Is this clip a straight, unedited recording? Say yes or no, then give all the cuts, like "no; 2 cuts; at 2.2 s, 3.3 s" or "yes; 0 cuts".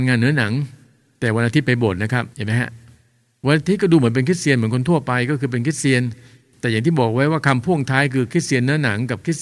no; 1 cut; at 2.3 s